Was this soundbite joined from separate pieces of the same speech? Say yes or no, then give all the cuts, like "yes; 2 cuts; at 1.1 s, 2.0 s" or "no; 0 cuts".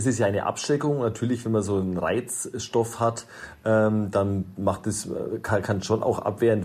no; 0 cuts